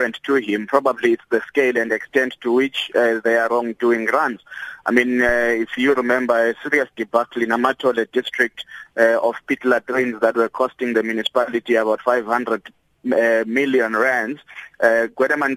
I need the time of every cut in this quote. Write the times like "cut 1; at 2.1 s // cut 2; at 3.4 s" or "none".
none